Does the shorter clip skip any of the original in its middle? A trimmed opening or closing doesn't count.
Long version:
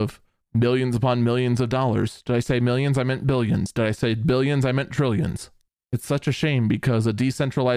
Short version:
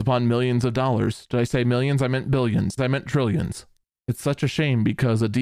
yes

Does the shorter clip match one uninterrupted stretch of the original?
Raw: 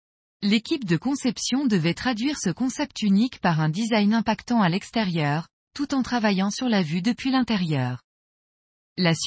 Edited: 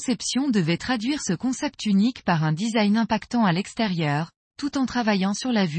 yes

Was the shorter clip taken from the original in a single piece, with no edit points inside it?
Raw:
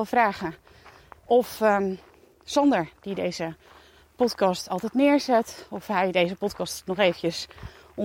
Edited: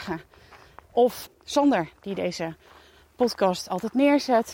no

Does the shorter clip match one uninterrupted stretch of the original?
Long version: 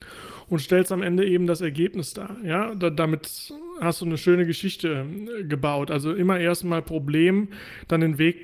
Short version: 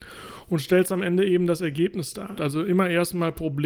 no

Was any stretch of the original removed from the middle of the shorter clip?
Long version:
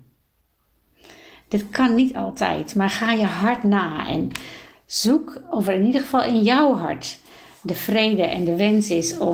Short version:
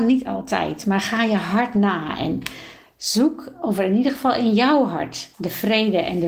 yes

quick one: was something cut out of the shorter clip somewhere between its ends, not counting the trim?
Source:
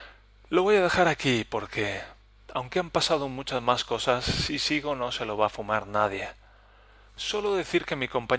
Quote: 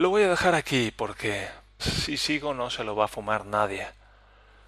yes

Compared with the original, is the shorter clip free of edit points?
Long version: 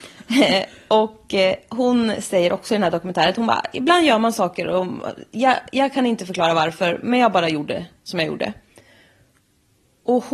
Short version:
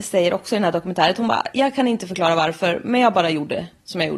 no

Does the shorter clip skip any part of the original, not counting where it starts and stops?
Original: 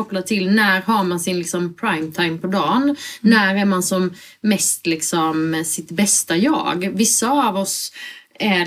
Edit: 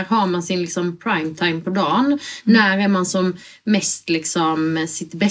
no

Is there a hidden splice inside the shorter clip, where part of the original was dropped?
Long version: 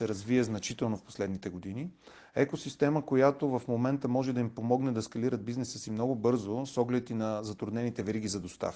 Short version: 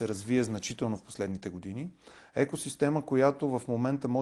no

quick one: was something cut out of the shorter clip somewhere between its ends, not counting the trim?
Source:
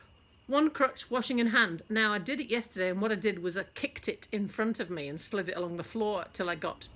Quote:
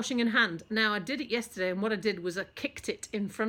no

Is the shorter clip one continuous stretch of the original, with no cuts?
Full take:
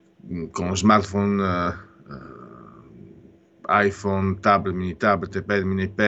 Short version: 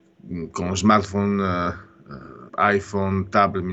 no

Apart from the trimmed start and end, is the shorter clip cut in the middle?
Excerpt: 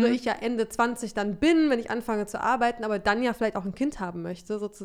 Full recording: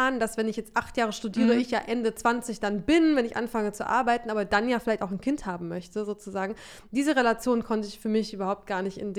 no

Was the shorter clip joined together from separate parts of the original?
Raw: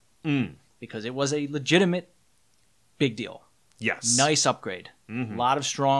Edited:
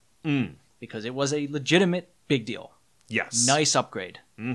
yes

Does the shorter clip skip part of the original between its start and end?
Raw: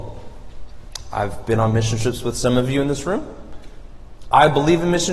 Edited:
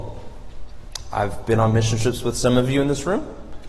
no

